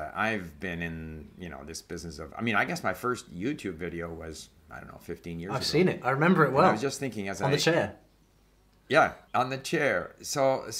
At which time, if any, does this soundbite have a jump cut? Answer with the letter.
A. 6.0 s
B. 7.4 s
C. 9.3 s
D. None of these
C